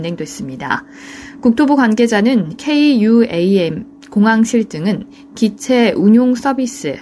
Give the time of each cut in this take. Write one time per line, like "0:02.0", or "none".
none